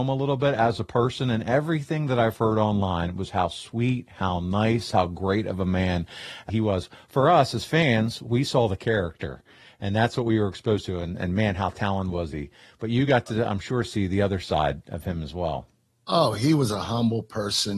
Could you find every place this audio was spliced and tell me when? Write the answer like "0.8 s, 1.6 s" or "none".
6.5 s